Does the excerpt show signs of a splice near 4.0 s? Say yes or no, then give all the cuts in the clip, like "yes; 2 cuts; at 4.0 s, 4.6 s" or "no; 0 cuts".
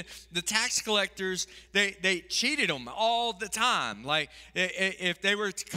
no; 0 cuts